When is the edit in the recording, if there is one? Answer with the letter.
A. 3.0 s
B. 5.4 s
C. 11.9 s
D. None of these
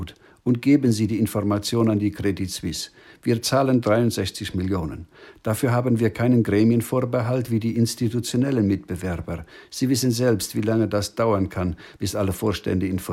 D